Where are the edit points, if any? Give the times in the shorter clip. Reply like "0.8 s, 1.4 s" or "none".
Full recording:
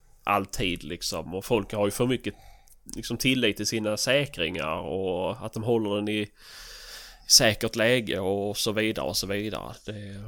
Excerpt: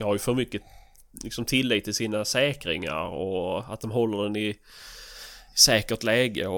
none